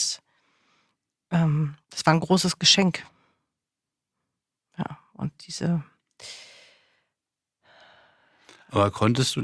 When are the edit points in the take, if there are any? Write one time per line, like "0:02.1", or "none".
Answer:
0:01.8